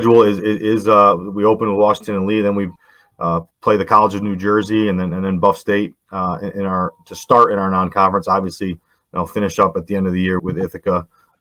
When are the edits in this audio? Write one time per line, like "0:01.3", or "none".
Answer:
0:03.5
0:10.4